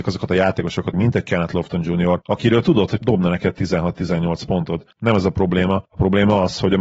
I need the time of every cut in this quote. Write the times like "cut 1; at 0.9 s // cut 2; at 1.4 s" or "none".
cut 1; at 0.9 s // cut 2; at 3.0 s